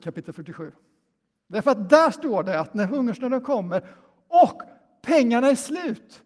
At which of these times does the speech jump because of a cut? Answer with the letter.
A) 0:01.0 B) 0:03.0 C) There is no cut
C